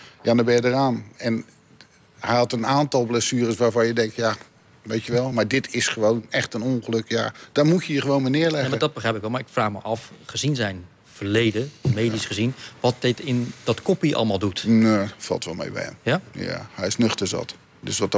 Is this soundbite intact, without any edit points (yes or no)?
yes